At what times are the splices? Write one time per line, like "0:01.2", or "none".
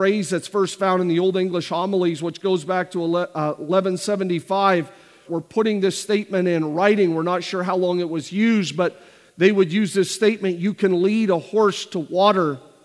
0:05.3